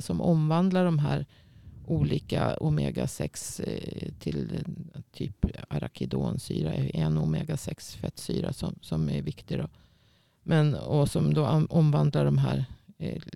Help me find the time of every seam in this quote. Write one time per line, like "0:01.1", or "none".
0:04.2